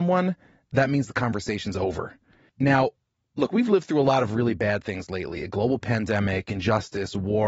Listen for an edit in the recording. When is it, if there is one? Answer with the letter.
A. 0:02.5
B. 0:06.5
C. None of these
C